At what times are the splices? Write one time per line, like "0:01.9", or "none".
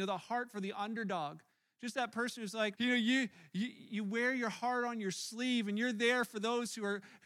0:02.7
0:03.9